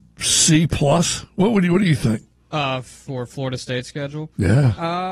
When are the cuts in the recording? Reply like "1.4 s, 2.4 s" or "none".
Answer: none